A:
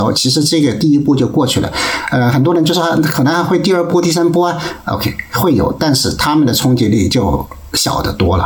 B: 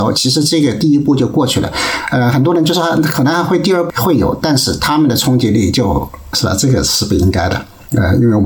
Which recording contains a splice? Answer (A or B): B